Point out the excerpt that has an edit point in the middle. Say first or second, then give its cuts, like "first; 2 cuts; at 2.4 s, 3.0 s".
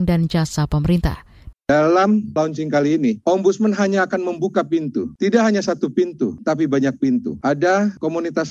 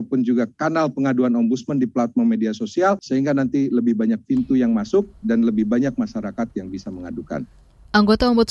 first; 1 cut; at 1.5 s